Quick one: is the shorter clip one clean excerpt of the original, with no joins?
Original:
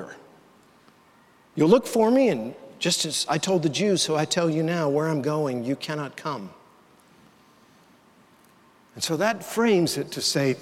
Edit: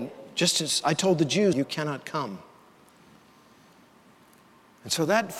no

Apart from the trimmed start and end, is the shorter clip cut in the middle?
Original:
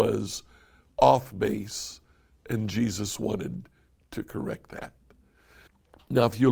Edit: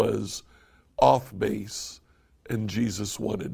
no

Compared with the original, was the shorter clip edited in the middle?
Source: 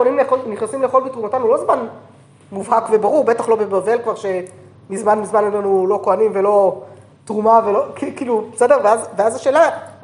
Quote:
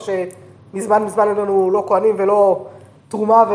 no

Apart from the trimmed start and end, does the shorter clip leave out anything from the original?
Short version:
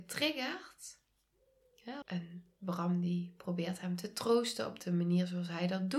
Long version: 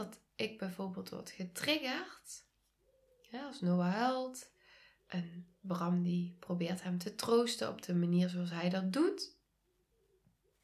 yes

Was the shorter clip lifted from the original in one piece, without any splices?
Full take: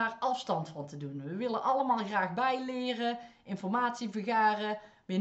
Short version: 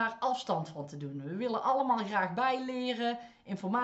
yes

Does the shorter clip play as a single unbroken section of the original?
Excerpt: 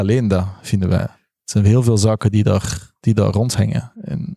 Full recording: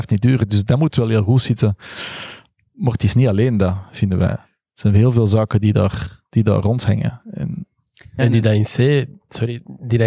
yes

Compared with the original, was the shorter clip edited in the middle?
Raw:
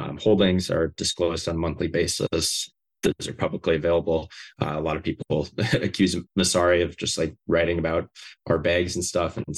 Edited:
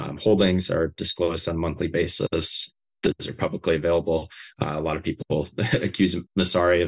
no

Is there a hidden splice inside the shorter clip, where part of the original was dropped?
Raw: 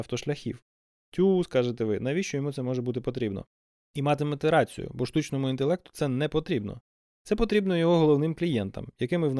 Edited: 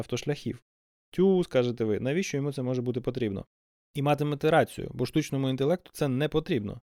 no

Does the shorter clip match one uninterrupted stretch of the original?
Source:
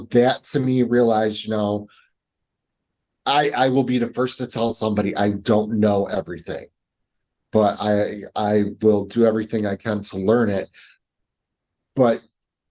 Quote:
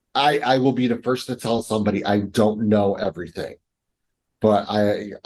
yes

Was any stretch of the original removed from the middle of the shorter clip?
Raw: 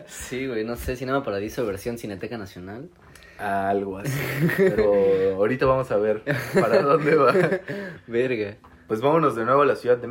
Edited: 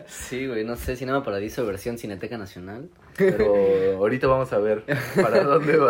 yes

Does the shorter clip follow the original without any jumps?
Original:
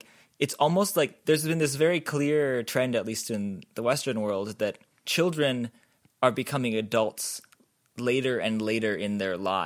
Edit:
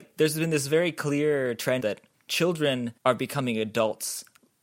no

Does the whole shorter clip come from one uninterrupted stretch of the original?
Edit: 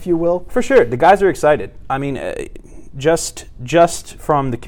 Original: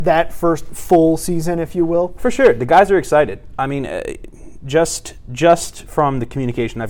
yes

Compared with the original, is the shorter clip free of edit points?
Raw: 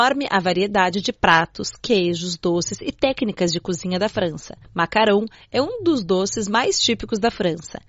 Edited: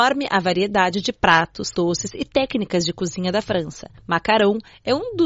no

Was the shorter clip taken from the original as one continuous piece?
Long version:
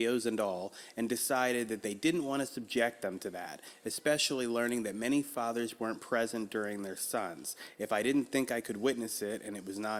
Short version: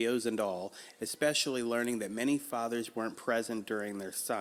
no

